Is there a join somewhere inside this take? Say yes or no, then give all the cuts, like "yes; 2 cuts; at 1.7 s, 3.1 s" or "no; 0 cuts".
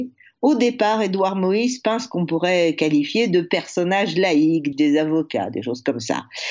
yes; 1 cut; at 4.7 s